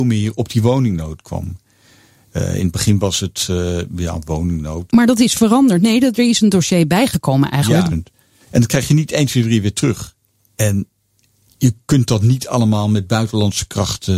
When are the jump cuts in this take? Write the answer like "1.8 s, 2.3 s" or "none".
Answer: 4.9 s, 7.9 s